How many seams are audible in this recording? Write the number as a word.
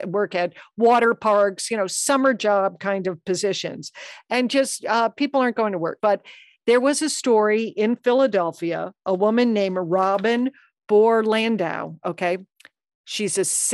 one